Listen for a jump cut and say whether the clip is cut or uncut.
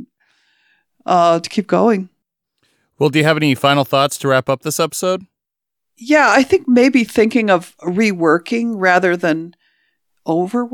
uncut